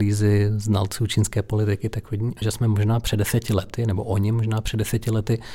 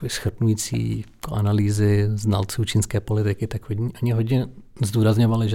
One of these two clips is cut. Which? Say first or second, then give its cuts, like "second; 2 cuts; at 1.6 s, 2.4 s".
first; 1 cut; at 2.4 s